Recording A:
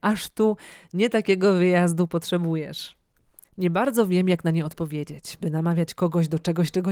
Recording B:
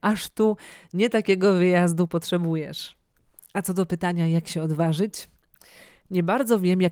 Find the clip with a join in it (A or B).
A